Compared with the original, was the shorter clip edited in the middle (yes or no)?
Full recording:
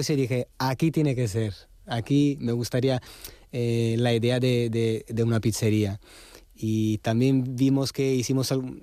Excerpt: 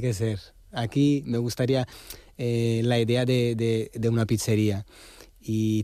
no